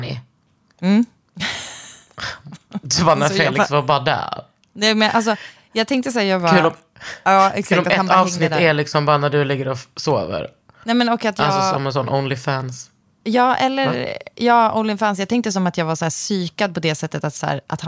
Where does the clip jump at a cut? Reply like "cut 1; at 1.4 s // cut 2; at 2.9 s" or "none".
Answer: none